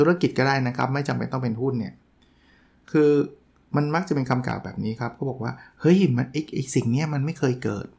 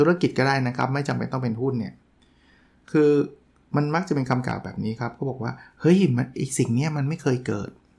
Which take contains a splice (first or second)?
second